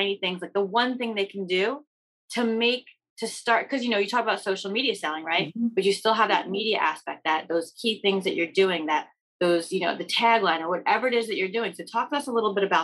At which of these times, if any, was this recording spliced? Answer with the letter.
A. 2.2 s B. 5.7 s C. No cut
C